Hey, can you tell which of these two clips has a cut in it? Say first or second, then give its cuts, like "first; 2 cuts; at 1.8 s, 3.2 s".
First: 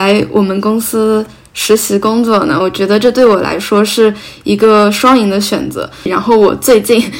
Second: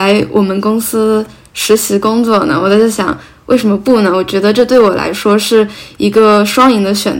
first; 2 cuts; at 2.6 s, 6.1 s